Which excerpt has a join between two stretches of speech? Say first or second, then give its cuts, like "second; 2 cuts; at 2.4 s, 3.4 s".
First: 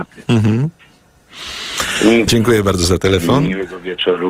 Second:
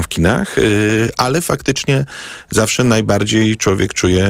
first; 1 cut; at 2.3 s